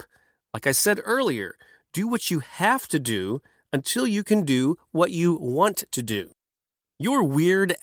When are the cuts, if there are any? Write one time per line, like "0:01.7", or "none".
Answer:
none

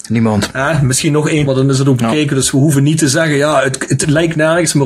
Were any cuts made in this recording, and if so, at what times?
0:01.5

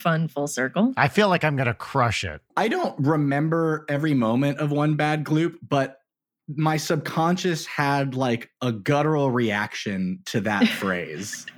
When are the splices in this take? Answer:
0:02.5

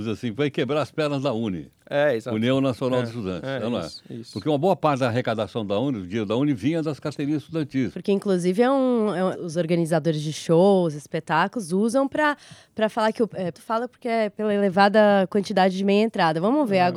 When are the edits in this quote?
0:07.9
0:09.3
0:13.5

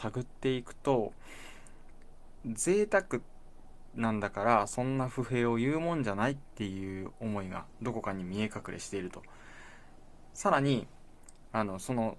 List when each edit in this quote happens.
0:02.4

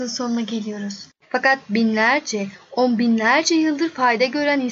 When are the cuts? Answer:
0:01.2

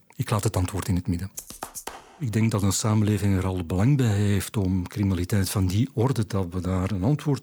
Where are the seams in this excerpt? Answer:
none

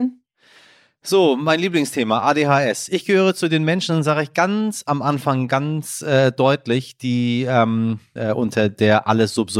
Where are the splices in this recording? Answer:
0:08.2

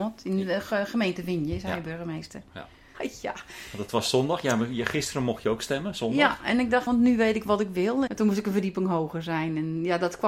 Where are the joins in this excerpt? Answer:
0:02.9
0:06.9
0:08.1

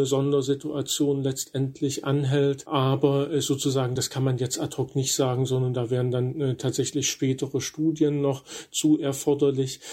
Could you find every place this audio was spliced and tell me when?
none

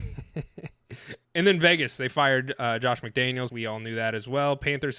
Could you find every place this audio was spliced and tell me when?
0:01.2
0:03.5

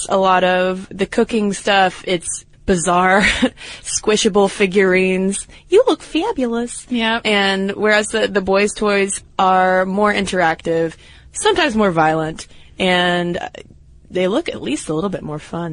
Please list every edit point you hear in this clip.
0:02.5

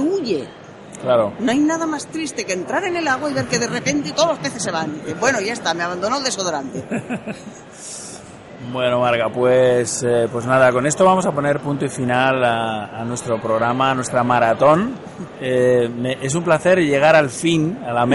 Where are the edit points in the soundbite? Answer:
none

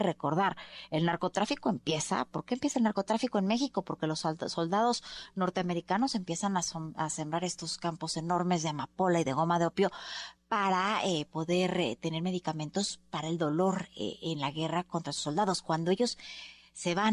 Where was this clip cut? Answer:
none

